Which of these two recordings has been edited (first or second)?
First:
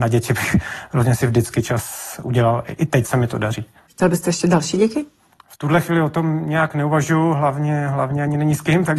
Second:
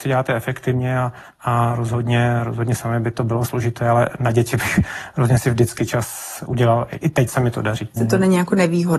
second